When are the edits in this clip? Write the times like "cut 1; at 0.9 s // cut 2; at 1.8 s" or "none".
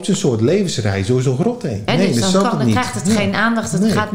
cut 1; at 1.9 s